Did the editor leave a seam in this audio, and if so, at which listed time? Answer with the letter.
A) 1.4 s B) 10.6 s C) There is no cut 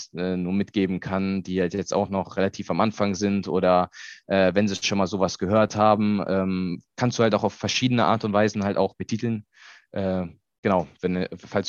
C